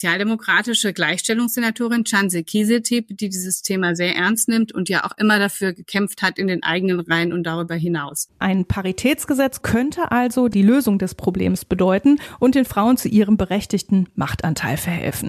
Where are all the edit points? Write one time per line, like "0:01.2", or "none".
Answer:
none

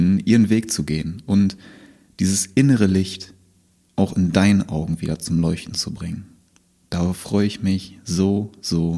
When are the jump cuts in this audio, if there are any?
none

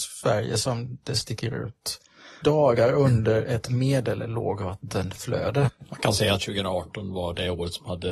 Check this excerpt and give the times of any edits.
0:02.4

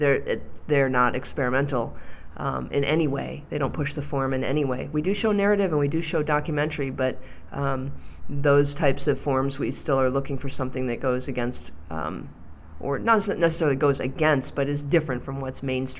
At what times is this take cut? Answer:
none

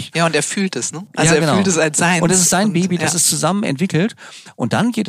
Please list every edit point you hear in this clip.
none

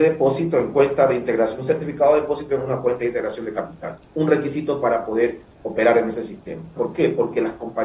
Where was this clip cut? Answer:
0:06.8

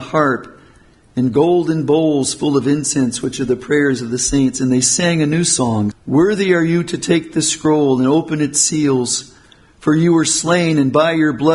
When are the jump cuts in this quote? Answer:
0:05.9

